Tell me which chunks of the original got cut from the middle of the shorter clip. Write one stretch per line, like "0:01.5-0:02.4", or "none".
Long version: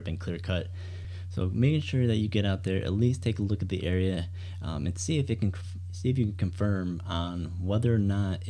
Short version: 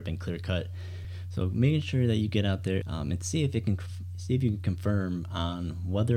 0:02.8-0:04.6